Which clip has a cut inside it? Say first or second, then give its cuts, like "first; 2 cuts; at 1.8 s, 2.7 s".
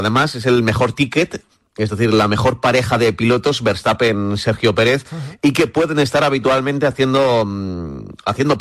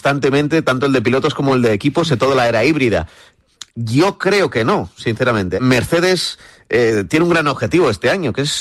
second; 2 cuts; at 3.7 s, 5.6 s